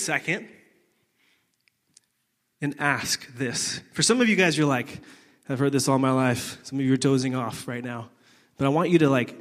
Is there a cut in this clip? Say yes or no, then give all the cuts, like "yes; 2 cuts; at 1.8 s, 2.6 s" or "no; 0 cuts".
no; 0 cuts